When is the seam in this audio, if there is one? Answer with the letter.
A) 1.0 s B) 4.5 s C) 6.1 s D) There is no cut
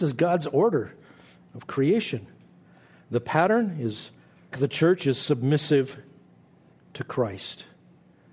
B